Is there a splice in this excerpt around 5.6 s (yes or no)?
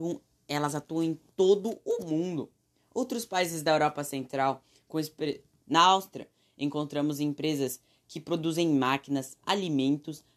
yes